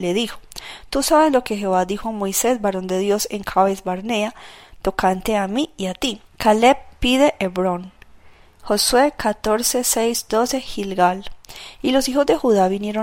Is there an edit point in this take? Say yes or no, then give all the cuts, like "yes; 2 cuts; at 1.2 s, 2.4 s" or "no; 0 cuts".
yes; 1 cut; at 6.3 s